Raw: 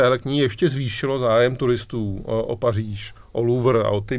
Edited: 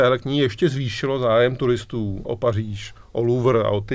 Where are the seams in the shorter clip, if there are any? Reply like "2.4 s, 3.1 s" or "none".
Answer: 2.2 s